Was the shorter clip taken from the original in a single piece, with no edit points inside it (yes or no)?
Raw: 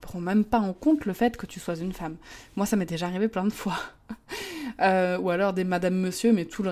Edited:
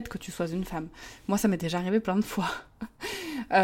yes